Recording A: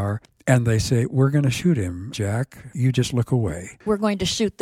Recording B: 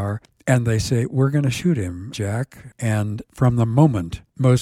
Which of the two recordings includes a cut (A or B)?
B